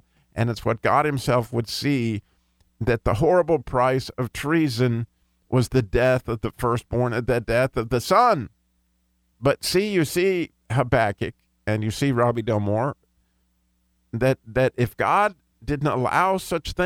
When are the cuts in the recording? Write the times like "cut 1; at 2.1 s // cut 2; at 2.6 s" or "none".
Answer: cut 1; at 9.3 s

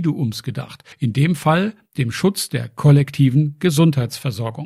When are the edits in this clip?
cut 1; at 0.9 s

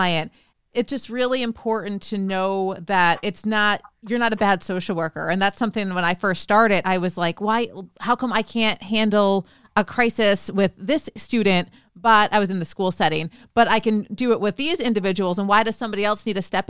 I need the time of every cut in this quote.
none

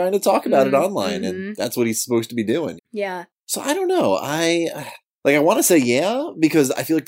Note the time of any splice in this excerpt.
cut 1; at 2.8 s

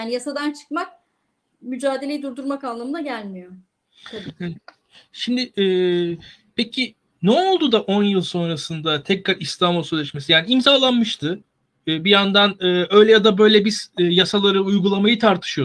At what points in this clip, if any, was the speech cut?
none

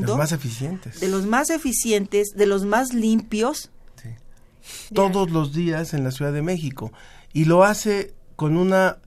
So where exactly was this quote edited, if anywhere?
cut 1; at 4.9 s

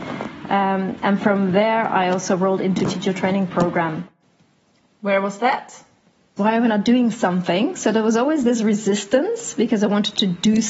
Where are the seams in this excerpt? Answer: cut 1; at 6.4 s

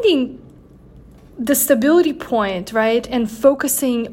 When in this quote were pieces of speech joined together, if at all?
none

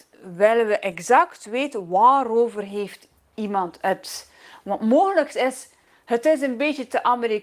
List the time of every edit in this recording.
none

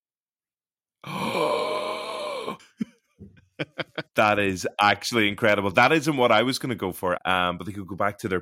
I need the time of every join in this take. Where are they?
cut 1; at 7.2 s

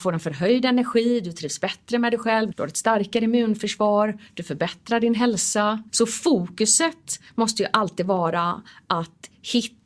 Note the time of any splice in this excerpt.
cut 1; at 2.5 s // cut 2; at 5.9 s

